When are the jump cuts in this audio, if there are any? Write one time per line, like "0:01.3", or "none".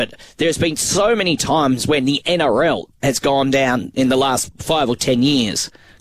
none